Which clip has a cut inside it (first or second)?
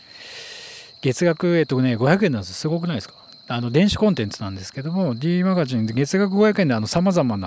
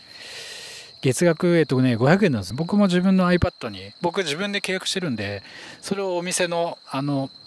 second